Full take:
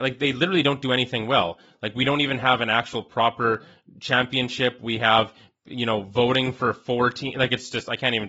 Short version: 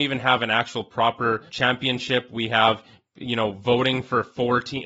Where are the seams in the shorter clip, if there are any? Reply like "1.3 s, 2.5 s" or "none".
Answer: 1.5 s

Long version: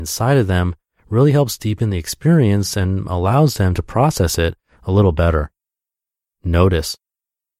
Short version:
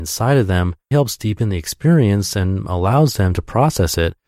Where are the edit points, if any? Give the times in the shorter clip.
0.9 s

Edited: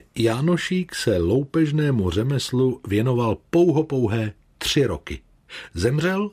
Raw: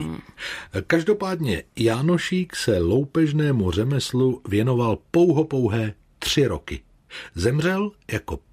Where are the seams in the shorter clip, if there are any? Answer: none

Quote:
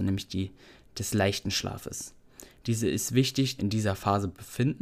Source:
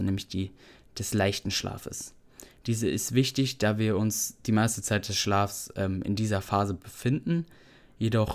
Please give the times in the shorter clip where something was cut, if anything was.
3.6 s

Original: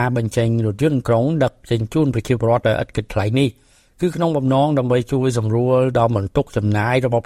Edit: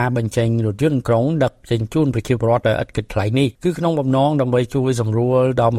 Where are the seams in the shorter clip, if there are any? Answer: 3.5 s

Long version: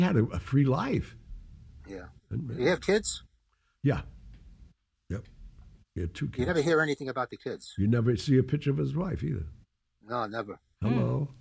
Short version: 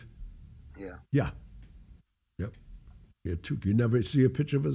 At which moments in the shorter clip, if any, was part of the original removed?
1.0 s, 3.6 s

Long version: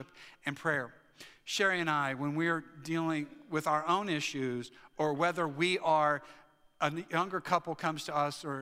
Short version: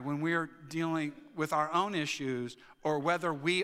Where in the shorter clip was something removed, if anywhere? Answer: none

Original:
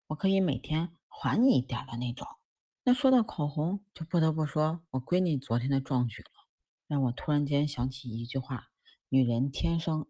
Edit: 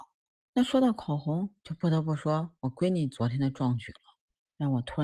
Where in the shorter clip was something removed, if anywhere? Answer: none

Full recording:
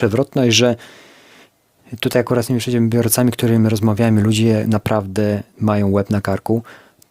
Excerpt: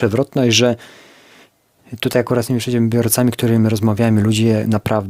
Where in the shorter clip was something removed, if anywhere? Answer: none

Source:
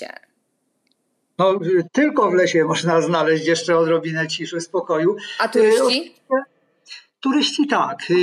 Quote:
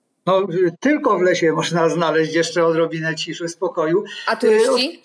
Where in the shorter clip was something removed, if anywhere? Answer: none

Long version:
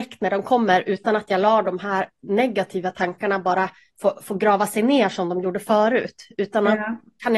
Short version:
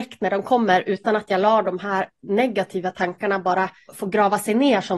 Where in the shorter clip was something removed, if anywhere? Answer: 3.9 s

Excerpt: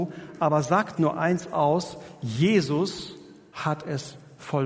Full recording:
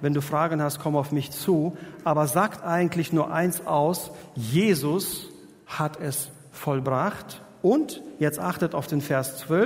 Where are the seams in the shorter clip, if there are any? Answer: 1.0 s

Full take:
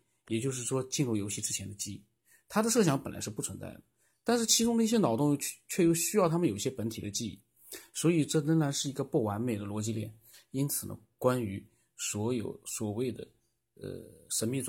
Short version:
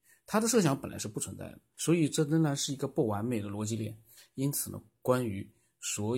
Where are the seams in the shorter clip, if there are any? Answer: 1.7 s

